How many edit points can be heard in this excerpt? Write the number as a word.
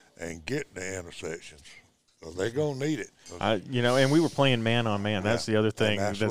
one